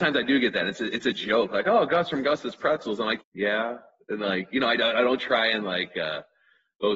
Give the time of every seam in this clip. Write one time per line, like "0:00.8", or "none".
0:03.2